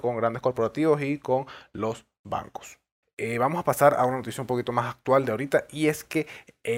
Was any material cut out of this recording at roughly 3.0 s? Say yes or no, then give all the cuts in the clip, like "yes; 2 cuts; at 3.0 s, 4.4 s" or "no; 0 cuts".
yes; 1 cut; at 3.0 s